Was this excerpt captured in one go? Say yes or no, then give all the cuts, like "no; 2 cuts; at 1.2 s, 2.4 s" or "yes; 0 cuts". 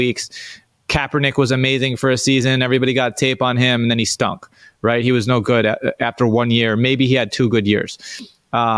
yes; 0 cuts